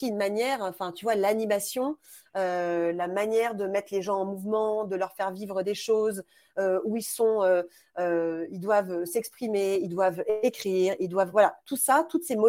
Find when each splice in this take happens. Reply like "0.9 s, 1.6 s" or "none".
none